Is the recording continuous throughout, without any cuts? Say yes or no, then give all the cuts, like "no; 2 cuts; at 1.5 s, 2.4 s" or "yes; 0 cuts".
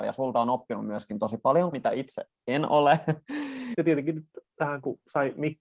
no; 2 cuts; at 1.7 s, 3.7 s